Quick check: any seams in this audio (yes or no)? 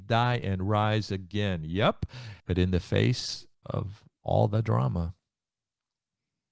yes